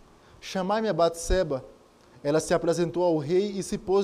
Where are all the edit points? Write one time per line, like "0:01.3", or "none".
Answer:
none